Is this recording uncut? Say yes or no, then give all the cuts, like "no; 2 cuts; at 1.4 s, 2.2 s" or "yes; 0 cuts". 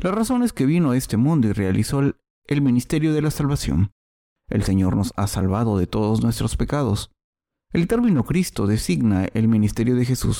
yes; 0 cuts